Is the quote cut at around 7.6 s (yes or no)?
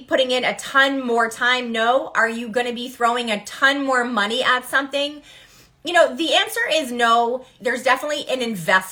yes